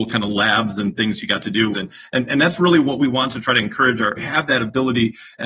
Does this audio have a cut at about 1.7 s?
yes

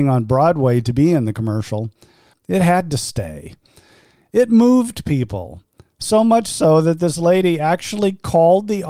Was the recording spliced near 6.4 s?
no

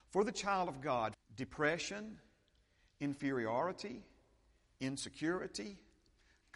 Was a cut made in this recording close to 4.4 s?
no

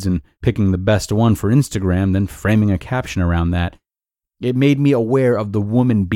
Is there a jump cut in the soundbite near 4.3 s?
yes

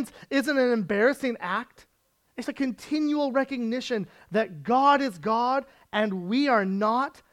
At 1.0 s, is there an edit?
no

